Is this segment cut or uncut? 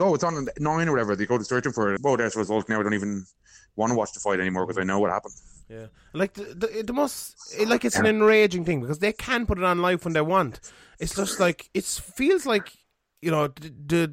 cut